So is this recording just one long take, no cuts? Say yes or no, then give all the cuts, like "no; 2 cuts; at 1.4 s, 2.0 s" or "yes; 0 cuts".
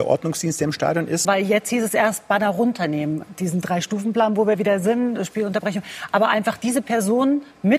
no; 1 cut; at 1.3 s